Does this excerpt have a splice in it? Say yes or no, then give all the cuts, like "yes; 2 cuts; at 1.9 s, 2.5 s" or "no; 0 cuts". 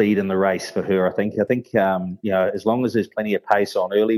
no; 0 cuts